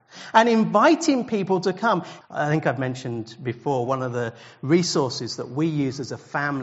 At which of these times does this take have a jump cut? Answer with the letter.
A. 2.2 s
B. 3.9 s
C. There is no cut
A